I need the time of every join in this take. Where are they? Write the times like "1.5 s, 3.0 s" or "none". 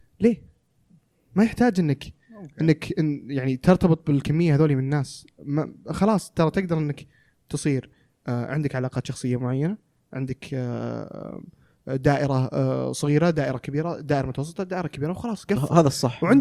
none